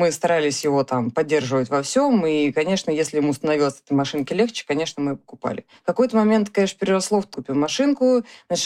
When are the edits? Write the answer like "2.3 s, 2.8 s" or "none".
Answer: 7.3 s